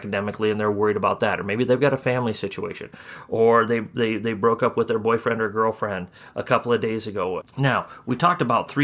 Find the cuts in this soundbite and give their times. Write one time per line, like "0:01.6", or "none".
0:07.4